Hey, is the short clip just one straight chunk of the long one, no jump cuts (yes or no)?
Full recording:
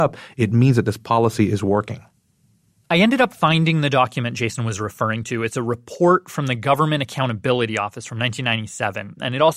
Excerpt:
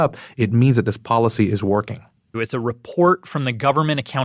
no